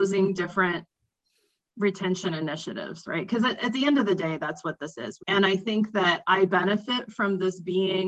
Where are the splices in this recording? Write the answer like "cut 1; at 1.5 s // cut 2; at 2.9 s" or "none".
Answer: cut 1; at 5.2 s